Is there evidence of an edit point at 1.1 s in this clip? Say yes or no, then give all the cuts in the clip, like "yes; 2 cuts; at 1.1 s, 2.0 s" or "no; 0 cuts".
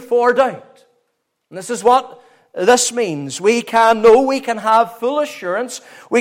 no; 0 cuts